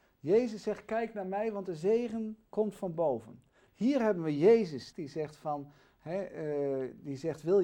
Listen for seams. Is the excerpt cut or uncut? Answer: cut